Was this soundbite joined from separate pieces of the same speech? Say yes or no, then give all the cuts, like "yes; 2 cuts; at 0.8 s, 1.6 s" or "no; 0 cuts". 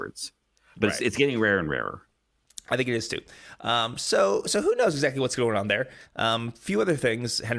yes; 1 cut; at 6.0 s